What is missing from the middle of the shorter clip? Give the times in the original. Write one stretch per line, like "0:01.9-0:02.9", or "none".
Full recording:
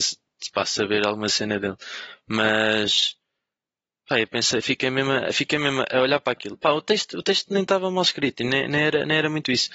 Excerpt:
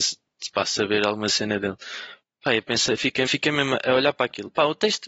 0:02.2-0:03.9
0:04.9-0:05.3